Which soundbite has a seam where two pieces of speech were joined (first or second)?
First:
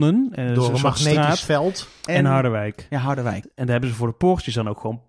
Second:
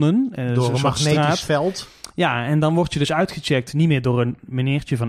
first